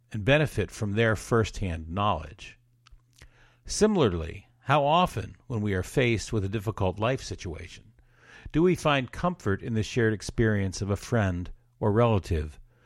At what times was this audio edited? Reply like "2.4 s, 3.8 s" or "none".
none